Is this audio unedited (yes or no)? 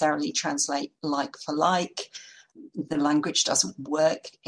yes